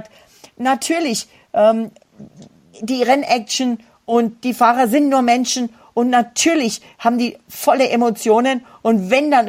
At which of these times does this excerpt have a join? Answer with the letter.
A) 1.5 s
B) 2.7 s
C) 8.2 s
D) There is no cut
B